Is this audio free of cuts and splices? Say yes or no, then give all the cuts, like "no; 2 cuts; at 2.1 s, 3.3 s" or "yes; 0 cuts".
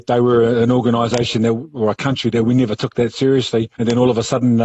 no; 1 cut; at 3.7 s